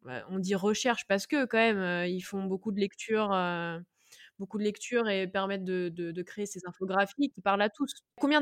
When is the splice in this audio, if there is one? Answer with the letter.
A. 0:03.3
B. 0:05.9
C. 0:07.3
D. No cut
C